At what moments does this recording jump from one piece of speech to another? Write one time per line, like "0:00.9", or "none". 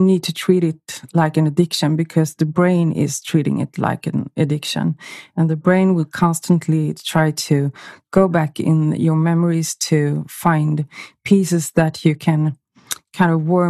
none